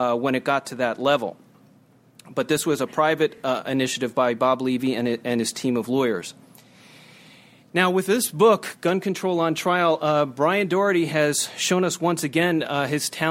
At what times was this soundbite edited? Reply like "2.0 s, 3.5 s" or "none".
none